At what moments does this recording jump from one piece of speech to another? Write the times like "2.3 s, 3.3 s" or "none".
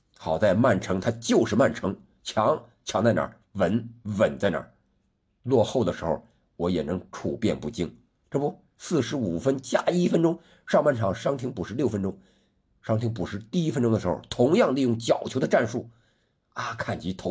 none